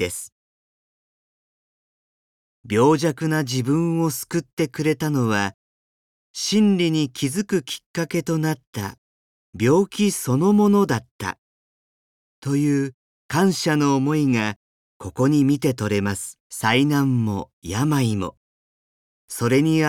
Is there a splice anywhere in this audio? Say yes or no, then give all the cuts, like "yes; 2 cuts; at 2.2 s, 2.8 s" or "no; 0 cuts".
yes; 1 cut; at 16.4 s